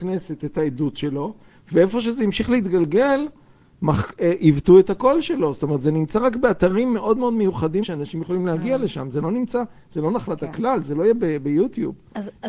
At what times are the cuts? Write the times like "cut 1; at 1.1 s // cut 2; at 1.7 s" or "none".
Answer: cut 1; at 7.8 s